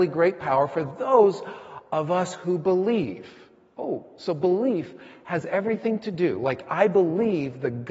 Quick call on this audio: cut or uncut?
uncut